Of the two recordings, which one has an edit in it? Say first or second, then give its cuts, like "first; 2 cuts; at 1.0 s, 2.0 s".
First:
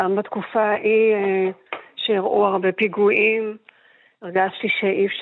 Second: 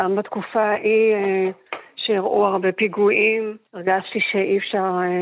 second; 1 cut; at 3.7 s